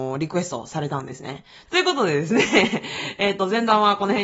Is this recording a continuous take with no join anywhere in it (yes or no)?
no